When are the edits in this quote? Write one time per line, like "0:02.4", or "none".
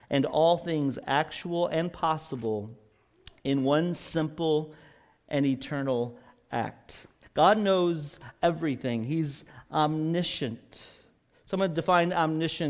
0:07.2